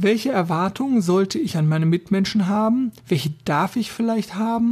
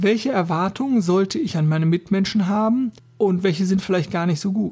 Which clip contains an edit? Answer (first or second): second